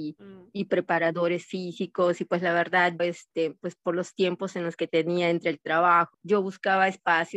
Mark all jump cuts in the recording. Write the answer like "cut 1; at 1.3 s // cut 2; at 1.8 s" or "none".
cut 1; at 3.0 s // cut 2; at 6.1 s